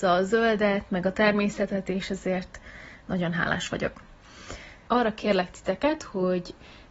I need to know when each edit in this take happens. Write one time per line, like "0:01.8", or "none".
0:04.9